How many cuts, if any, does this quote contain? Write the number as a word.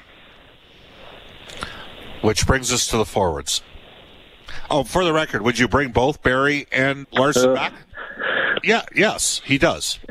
two